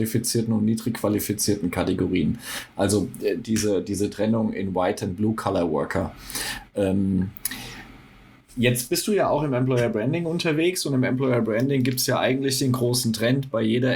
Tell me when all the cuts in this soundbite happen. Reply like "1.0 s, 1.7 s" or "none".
none